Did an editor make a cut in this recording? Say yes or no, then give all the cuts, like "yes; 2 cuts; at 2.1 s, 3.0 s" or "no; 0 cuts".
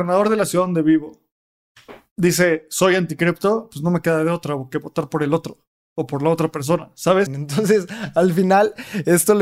yes; 1 cut; at 7.3 s